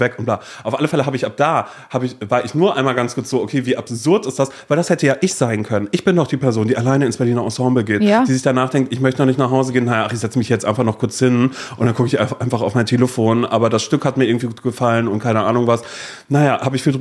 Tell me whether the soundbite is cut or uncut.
uncut